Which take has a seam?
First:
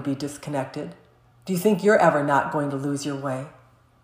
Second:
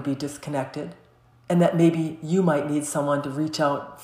second; 1 cut; at 1.3 s

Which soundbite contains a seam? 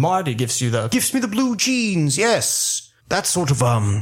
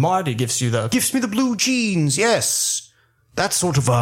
first; 1 cut; at 3.0 s

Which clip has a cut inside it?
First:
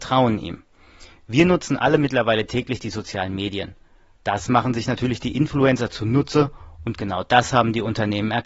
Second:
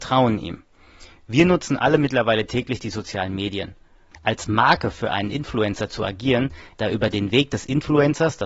second; 2 cuts; at 4.1 s, 6.7 s

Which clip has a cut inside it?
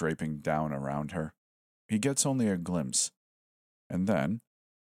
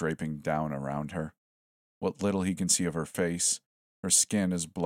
first; 1 cut; at 1.7 s

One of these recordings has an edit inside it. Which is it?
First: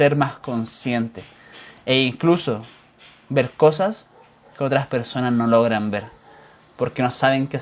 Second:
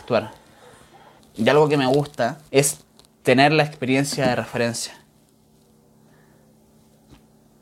second; 2 cuts; at 1.2 s, 2.5 s

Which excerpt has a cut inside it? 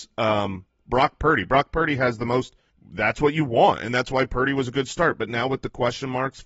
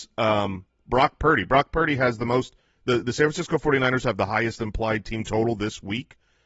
first; 1 cut; at 2.7 s

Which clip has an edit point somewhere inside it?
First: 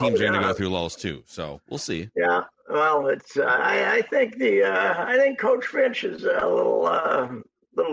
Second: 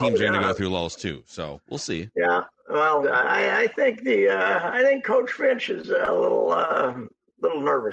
second; 1 cut; at 3.0 s

